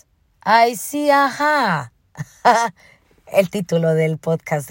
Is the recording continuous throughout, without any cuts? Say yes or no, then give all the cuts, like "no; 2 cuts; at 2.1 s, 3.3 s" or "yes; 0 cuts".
yes; 0 cuts